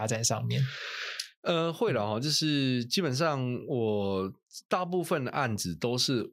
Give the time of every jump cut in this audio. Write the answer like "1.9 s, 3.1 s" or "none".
none